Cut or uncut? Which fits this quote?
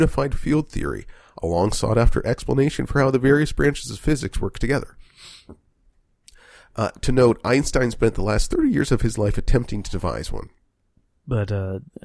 uncut